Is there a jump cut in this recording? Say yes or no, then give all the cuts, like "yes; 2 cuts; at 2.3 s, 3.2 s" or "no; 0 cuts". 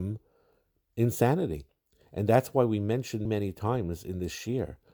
yes; 1 cut; at 3.3 s